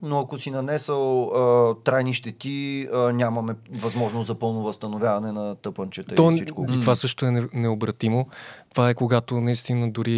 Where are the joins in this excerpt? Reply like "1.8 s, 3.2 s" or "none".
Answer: 6.7 s

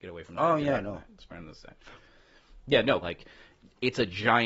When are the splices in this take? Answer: 3.0 s

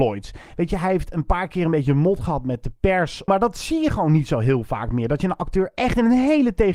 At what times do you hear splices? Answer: 3.3 s

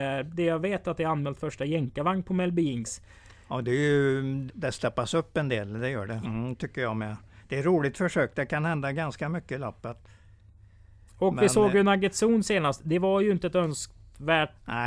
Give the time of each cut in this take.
4.5 s, 6.2 s

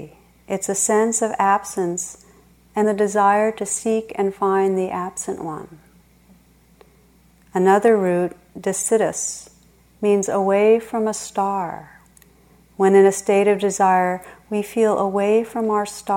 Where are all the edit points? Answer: 2.8 s

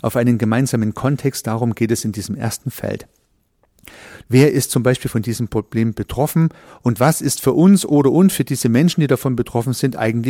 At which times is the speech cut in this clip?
4.2 s

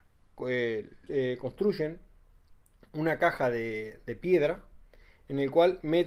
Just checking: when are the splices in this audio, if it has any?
1.1 s

